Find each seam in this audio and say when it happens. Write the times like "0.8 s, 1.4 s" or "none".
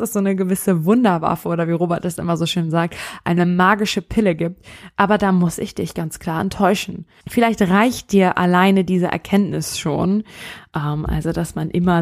7.2 s